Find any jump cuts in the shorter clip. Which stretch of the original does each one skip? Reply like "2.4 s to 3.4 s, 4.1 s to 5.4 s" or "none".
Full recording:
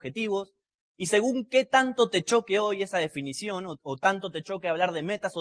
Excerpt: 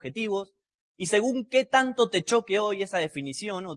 none